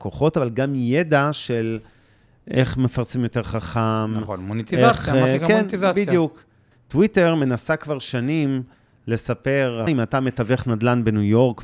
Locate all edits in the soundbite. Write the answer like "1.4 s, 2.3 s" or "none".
6.7 s, 9.9 s